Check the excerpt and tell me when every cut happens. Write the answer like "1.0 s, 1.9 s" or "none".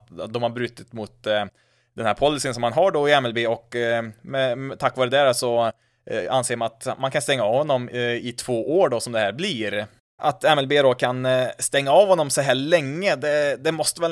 none